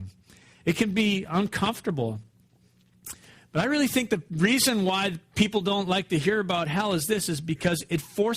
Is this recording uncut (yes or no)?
yes